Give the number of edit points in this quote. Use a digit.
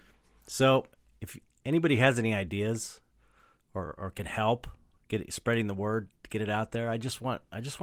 0